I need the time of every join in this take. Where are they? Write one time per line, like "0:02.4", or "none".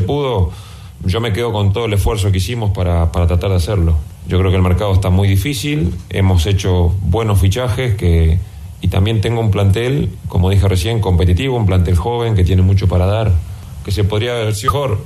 none

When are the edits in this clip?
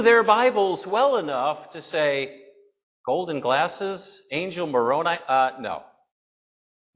none

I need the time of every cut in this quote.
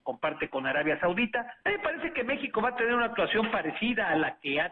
0:01.6

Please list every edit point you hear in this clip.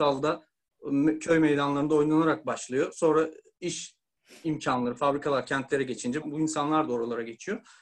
0:06.2

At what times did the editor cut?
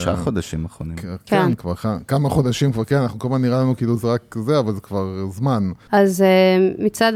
0:05.9

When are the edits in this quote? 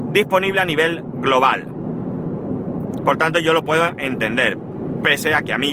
0:03.0

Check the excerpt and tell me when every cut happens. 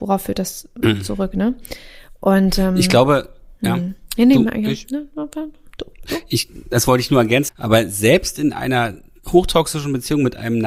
0:07.5

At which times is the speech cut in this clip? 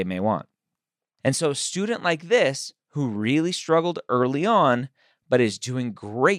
0:01.2

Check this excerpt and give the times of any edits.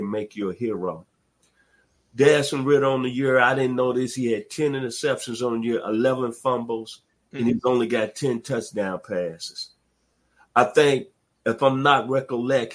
none

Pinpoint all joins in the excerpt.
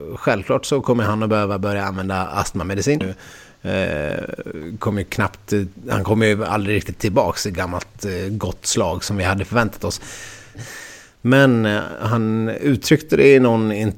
0:03.0
0:10.5

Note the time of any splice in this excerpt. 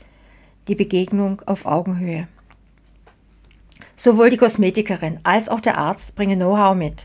none

